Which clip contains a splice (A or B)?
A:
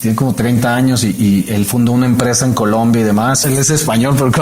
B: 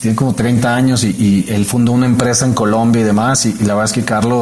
A